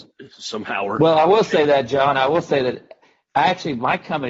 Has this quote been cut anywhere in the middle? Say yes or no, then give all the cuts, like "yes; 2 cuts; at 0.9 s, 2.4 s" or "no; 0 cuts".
no; 0 cuts